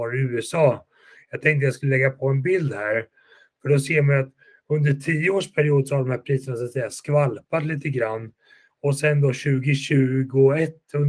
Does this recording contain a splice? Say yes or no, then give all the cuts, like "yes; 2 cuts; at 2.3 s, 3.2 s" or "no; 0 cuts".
no; 0 cuts